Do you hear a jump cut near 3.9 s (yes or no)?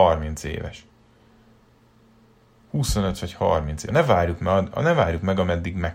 yes